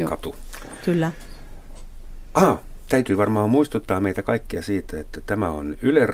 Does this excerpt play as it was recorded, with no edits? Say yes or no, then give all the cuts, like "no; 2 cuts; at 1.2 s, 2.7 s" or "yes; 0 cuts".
yes; 0 cuts